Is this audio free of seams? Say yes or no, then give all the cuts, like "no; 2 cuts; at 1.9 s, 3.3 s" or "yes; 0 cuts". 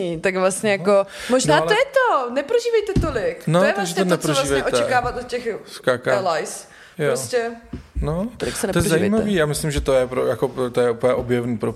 yes; 0 cuts